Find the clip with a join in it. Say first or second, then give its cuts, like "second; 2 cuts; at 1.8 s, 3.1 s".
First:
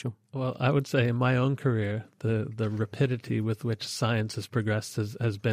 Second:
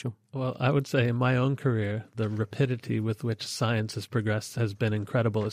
second; 2 cuts; at 2.1 s, 4.5 s